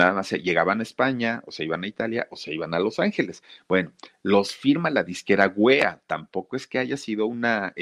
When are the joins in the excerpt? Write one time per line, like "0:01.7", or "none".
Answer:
0:03.6